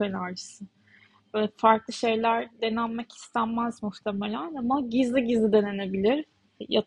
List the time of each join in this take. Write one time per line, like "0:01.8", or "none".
none